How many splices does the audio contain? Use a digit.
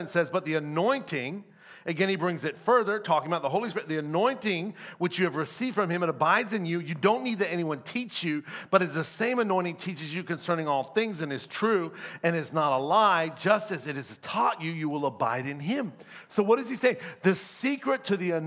0